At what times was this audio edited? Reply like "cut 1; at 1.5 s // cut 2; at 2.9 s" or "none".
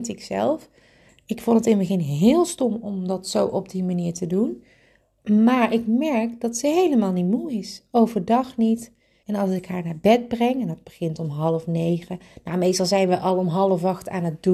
cut 1; at 9.2 s